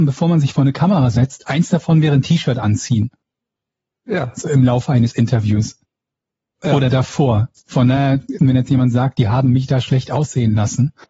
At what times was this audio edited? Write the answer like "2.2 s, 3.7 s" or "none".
8.4 s